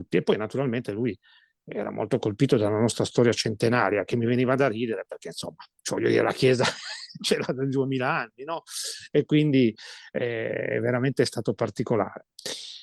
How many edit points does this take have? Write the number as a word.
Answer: zero